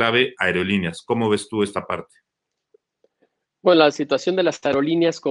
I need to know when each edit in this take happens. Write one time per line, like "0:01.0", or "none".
none